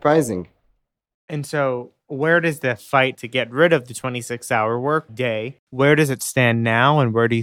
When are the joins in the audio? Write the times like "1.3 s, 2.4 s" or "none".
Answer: 1.1 s